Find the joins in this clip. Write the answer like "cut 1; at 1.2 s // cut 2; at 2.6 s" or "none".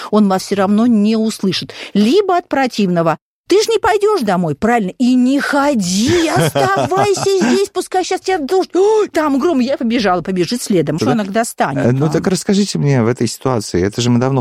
cut 1; at 11.0 s